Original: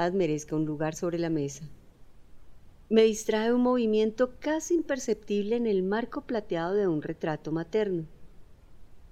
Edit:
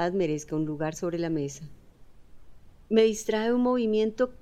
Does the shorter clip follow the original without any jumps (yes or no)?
yes